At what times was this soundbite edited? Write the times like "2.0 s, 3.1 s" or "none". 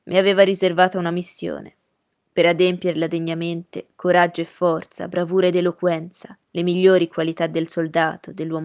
6.4 s